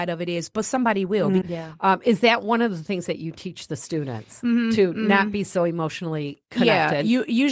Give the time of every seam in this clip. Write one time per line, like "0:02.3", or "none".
0:01.4